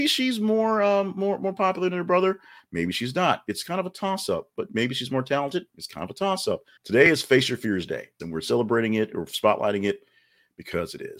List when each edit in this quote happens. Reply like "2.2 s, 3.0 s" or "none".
6.8 s, 8.2 s